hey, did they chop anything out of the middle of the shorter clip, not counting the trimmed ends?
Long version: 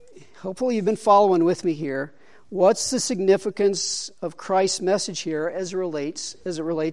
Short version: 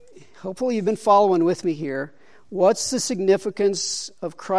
no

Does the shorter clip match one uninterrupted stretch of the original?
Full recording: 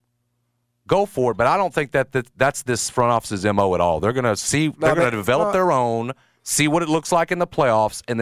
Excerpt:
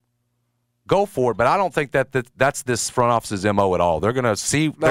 yes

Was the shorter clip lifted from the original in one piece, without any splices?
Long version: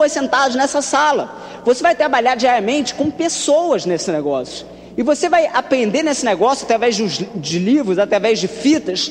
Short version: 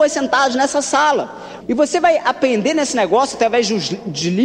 no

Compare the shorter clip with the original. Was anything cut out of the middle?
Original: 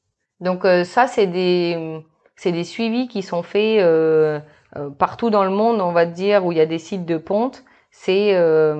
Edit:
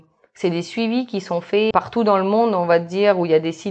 yes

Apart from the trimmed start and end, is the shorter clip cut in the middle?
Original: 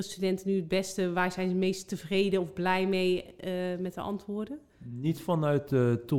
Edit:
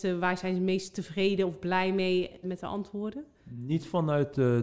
yes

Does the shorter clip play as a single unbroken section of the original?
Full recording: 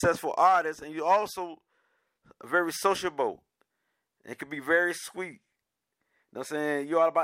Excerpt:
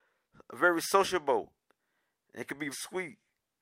no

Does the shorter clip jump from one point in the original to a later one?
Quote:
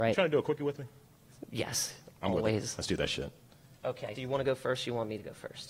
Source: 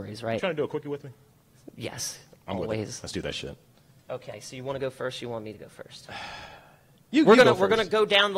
yes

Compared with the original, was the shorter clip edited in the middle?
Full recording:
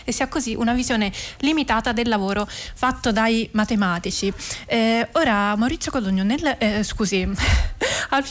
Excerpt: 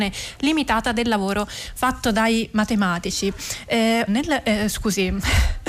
yes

